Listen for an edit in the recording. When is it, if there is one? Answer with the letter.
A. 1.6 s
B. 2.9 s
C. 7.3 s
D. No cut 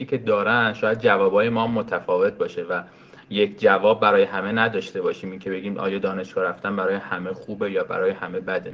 D